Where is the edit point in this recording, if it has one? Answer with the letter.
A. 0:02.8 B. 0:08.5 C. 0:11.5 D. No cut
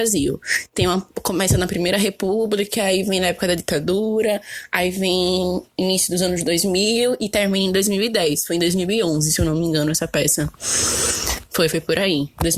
D